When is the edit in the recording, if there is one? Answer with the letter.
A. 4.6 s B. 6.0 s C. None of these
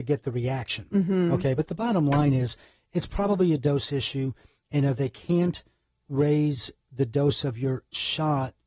C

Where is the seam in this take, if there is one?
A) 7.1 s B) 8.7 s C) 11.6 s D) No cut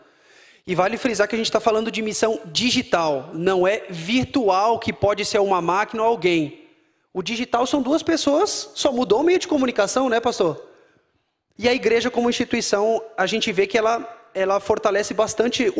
C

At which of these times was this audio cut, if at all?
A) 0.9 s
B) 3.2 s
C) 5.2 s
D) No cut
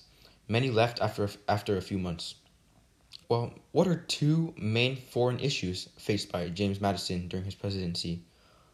B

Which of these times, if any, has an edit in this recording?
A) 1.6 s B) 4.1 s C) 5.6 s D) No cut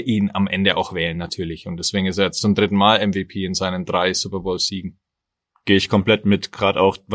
D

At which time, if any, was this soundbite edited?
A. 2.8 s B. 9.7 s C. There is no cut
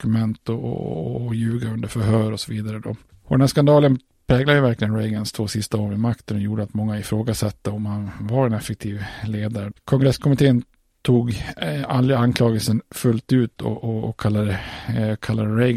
B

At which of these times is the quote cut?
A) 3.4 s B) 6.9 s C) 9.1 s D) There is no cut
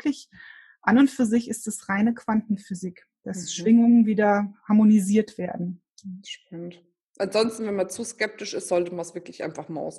D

